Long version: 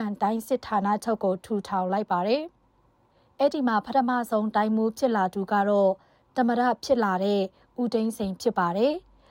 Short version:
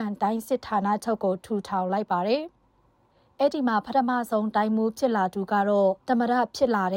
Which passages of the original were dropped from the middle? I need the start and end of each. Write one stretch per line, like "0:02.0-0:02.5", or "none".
0:06.0-0:06.3